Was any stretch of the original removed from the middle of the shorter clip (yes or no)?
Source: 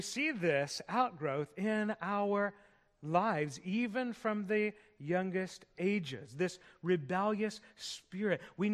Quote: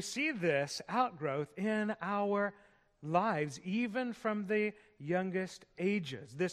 no